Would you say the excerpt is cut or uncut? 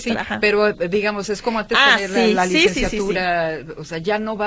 uncut